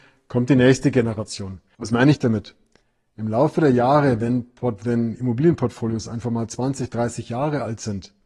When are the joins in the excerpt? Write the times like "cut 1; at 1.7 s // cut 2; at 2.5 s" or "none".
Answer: cut 1; at 1.7 s